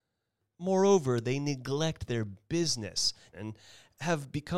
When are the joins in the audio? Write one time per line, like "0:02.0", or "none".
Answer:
0:03.3